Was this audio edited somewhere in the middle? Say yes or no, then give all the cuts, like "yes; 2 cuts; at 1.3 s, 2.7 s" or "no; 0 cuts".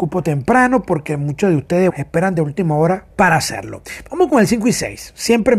yes; 2 cuts; at 1.9 s, 3.1 s